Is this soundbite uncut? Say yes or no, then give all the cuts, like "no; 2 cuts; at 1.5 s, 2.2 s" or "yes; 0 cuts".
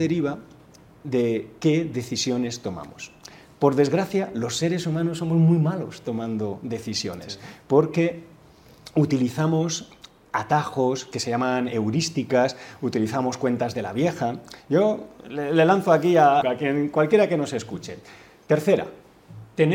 no; 2 cuts; at 16.4 s, 18.5 s